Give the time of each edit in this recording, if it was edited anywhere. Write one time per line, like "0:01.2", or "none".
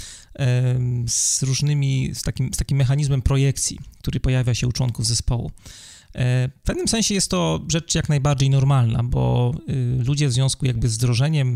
none